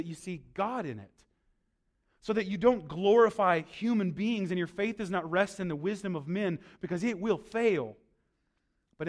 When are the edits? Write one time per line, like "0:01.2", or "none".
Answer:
none